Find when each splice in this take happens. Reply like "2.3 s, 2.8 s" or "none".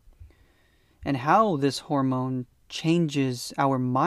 0.9 s